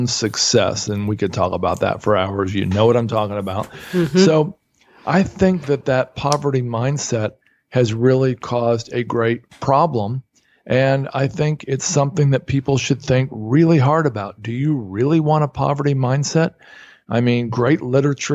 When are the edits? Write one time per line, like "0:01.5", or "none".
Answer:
none